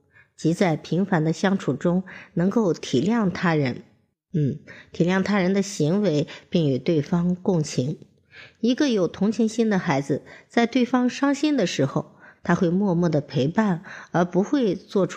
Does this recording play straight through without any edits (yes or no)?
yes